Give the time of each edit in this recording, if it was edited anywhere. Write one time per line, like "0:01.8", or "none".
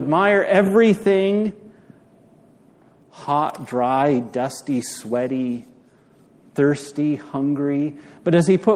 0:03.0